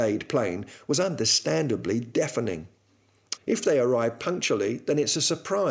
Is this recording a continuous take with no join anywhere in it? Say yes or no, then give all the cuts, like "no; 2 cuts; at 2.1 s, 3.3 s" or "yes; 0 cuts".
no; 1 cut; at 3.4 s